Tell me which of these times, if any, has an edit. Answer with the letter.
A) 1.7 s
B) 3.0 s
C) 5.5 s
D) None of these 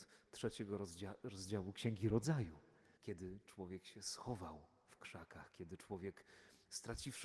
B